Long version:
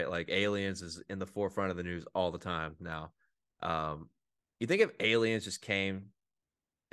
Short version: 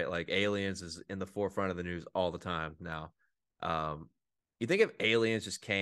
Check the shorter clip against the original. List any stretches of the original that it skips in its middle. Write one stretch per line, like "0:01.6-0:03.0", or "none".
none